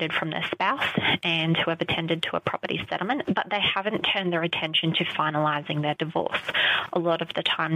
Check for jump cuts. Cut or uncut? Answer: cut